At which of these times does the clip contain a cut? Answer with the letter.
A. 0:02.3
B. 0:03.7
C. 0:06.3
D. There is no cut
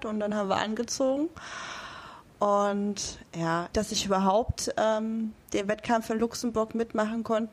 B